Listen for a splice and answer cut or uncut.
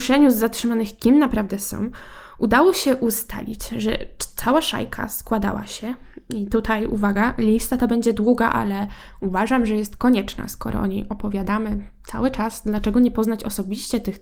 uncut